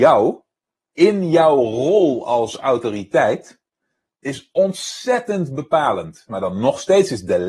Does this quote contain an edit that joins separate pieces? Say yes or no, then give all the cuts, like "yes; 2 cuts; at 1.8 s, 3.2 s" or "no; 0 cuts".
yes; 1 cut; at 6.3 s